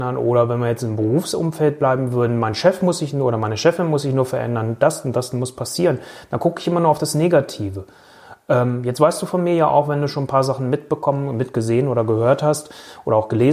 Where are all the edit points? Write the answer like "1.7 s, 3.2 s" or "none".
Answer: none